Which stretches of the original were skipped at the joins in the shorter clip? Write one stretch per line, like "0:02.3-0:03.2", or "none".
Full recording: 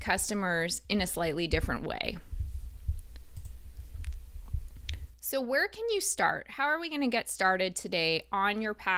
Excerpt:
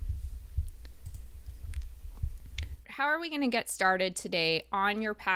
0:05.2-0:06.4